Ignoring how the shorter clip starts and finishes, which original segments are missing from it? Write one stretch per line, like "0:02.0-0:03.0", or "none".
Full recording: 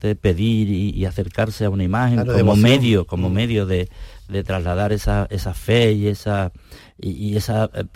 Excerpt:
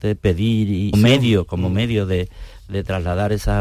0:00.9-0:02.5